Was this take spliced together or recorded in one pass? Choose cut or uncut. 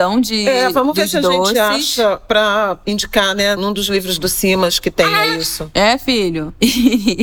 uncut